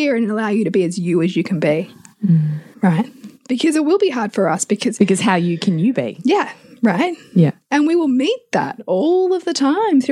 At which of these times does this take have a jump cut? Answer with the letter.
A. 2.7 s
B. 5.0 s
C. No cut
A